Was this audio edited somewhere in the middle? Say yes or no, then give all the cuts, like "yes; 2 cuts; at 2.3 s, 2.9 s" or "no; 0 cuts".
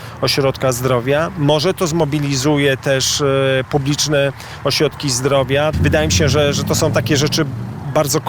yes; 1 cut; at 5.7 s